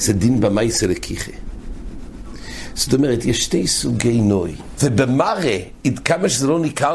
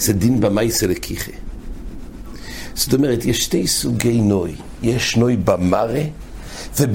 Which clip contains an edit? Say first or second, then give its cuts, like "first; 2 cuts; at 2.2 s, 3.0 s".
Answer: first; 1 cut; at 4.8 s